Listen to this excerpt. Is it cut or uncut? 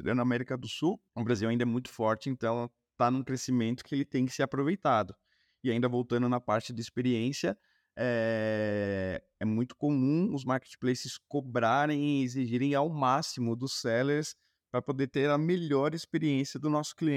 uncut